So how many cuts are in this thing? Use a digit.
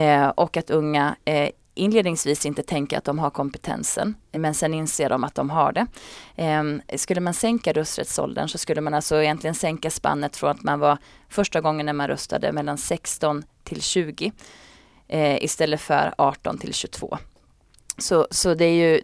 1